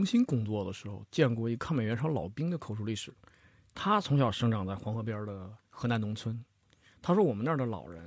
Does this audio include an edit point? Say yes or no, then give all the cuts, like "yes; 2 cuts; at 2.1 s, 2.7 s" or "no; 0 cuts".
no; 0 cuts